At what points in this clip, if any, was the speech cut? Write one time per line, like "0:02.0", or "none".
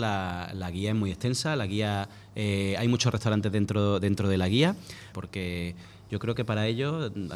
0:05.1